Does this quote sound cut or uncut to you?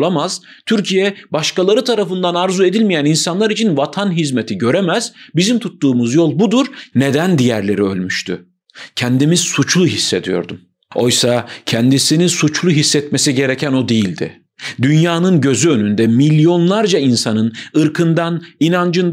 cut